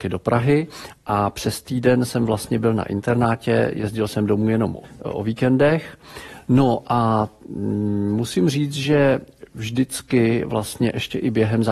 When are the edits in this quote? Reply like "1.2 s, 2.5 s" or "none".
4.8 s